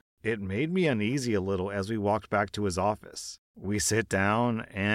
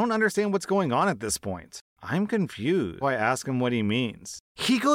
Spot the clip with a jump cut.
second; 2 cuts; at 1.9 s, 3.0 s

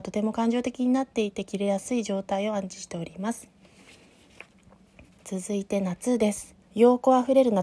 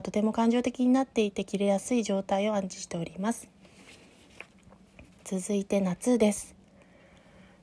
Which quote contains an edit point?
first; 1 cut; at 6.6 s

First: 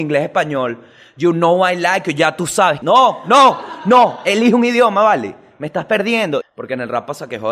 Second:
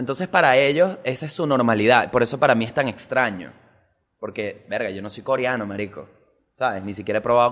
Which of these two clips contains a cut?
first; 2 cuts; at 2.8 s, 6.4 s

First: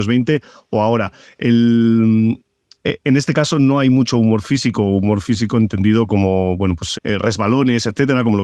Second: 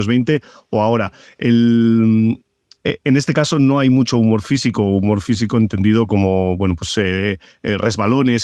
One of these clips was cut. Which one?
first; 1 cut; at 6.9 s

